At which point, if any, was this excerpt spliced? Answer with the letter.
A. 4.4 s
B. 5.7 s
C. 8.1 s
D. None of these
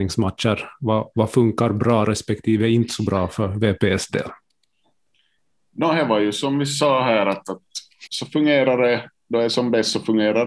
C